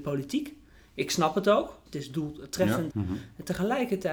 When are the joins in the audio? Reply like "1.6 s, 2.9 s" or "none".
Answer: 1.9 s, 2.9 s